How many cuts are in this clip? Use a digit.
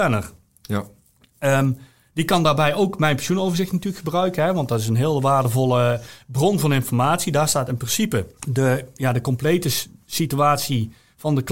1